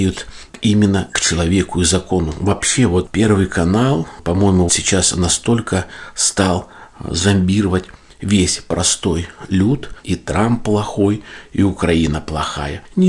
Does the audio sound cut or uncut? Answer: cut